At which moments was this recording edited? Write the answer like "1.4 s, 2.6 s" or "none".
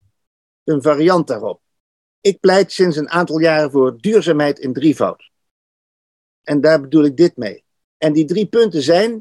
7.9 s